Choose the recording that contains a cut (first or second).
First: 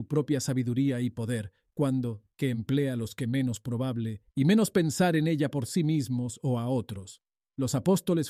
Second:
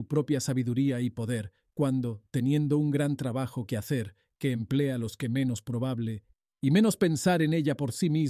first